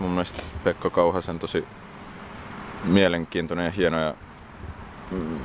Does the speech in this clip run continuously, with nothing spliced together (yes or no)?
yes